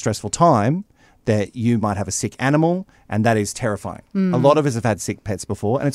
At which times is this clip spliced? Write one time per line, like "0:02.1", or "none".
none